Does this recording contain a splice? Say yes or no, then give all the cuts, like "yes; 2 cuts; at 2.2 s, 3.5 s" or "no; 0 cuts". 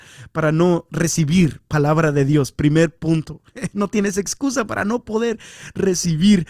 no; 0 cuts